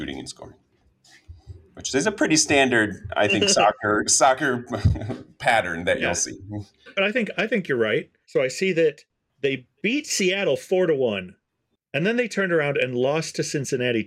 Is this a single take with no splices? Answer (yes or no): no